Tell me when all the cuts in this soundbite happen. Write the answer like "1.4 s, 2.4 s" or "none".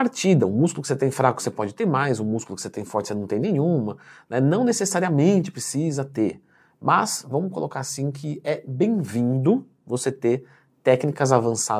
none